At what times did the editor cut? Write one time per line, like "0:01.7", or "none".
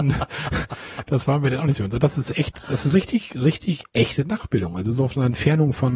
none